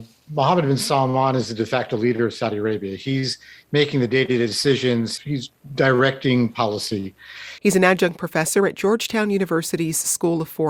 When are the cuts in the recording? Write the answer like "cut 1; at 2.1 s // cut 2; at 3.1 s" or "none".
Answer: cut 1; at 5.2 s // cut 2; at 7.6 s